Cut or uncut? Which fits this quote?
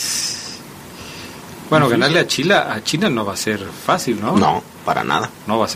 uncut